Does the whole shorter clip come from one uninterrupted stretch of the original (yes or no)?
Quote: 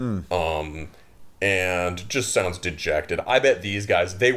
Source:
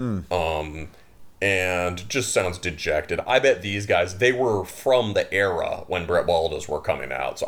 yes